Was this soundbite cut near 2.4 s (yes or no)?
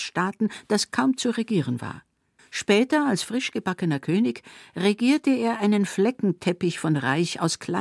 yes